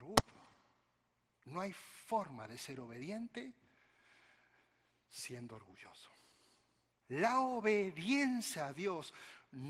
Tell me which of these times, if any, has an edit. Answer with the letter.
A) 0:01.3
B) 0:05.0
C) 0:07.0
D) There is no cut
C